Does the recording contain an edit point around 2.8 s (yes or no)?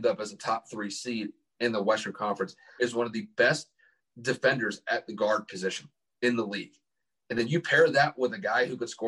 yes